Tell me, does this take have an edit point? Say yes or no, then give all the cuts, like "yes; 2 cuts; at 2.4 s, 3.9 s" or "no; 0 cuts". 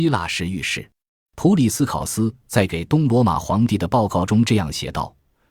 yes; 1 cut; at 1.2 s